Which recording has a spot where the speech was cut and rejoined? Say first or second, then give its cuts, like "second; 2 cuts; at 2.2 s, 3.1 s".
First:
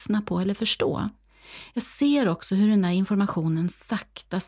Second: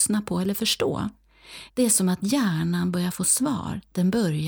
second; 1 cut; at 1.7 s